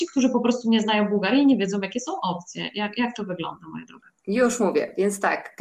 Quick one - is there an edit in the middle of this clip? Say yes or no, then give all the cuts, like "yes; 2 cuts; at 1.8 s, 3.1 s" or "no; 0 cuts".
yes; 1 cut; at 4.2 s